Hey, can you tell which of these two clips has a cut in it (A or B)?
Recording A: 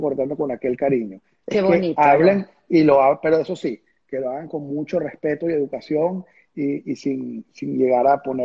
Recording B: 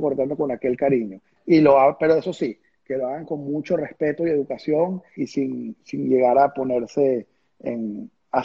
B